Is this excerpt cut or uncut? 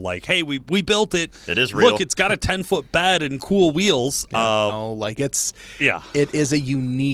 cut